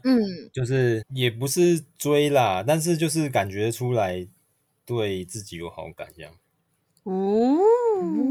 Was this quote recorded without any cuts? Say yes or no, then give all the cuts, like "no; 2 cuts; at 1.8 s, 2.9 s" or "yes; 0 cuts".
no; 1 cut; at 1.0 s